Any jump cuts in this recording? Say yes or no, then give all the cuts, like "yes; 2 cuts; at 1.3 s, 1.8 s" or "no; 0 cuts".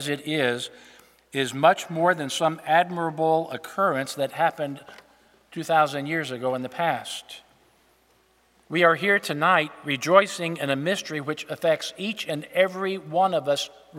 no; 0 cuts